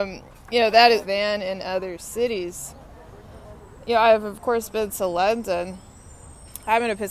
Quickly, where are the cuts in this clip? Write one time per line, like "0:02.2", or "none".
0:01.0